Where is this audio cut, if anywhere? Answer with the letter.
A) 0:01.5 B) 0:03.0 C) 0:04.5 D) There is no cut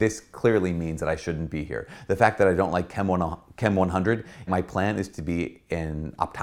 C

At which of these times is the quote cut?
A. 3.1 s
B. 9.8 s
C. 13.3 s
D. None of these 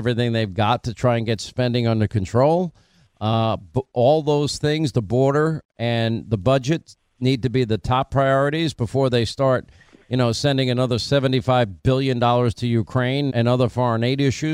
C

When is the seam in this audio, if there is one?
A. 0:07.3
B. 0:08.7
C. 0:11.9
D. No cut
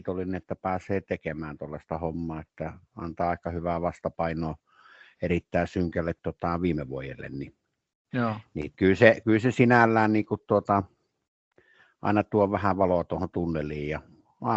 B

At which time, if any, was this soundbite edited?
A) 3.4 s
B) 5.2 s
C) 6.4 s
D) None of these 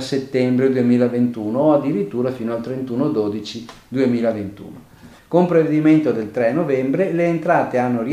B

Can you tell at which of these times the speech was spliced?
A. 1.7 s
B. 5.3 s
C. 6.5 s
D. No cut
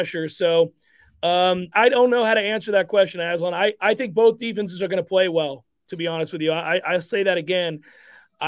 A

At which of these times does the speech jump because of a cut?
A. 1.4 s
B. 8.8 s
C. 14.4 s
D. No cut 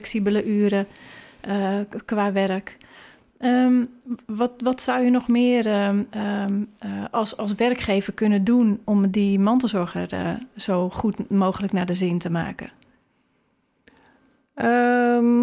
B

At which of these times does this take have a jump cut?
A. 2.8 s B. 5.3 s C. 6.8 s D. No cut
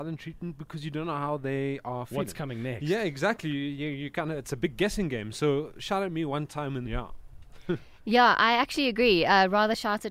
C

